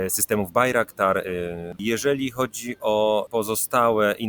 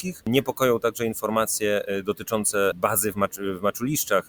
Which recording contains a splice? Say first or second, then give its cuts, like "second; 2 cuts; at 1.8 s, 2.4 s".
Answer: first; 1 cut; at 1.8 s